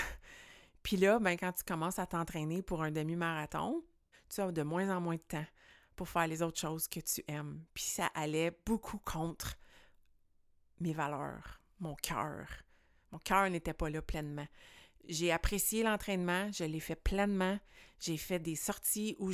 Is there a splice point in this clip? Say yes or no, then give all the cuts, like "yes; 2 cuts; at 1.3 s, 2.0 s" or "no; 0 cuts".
yes; 1 cut; at 4.1 s